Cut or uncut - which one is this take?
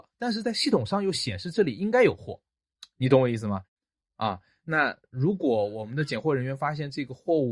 uncut